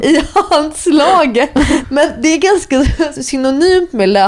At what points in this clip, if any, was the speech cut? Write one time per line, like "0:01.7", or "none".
0:01.8
0:03.2